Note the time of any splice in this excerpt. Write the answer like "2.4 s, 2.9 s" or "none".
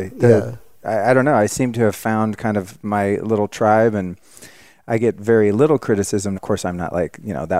6.3 s